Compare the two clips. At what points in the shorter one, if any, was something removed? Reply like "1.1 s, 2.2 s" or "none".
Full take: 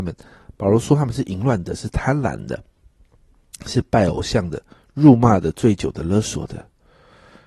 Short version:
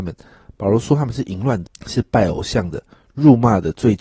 1.7 s